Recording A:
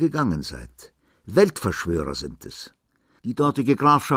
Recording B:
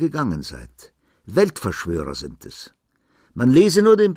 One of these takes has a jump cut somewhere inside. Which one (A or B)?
A